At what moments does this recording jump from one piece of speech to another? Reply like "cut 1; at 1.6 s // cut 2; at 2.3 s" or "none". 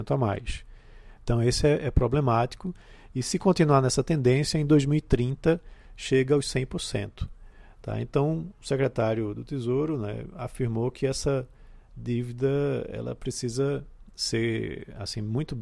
cut 1; at 1.2 s